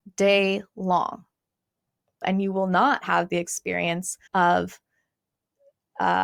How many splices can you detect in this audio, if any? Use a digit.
2